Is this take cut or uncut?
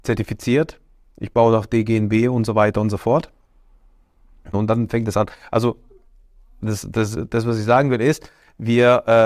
cut